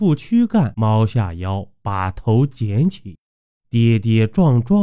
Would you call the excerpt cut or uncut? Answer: uncut